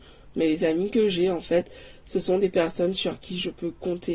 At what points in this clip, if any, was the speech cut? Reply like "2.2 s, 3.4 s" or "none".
none